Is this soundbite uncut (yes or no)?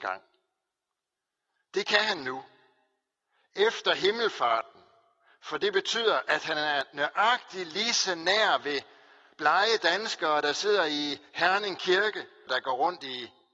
no